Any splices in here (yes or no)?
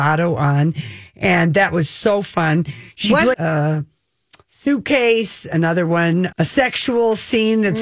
yes